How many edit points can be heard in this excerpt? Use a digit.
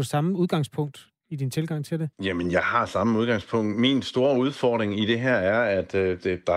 1